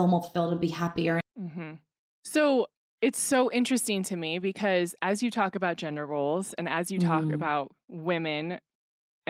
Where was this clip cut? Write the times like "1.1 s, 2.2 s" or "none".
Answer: 1.2 s